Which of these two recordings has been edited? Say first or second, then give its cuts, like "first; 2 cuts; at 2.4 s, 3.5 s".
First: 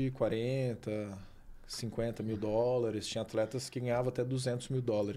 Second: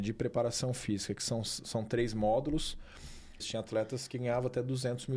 second; 1 cut; at 3.4 s